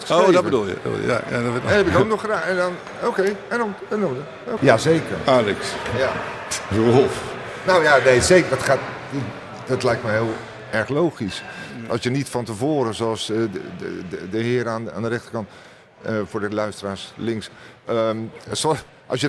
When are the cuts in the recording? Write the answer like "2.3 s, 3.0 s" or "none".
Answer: 4.6 s